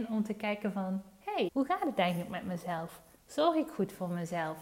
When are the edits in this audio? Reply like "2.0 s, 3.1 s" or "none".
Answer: 1.5 s